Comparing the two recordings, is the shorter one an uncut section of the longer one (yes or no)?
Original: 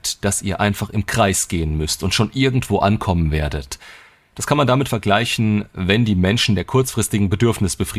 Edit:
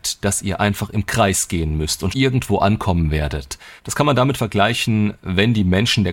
no